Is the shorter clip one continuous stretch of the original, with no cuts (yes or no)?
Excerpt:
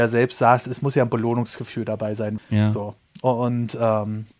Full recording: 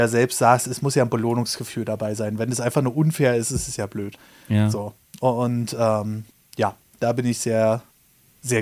no